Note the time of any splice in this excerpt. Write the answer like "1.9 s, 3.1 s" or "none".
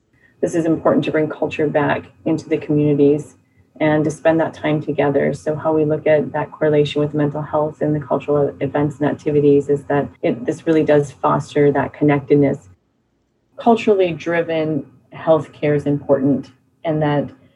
10.2 s, 13.5 s